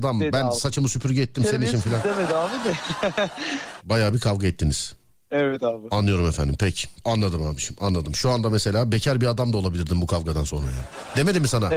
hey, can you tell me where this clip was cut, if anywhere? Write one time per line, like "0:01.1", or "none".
0:03.8
0:07.0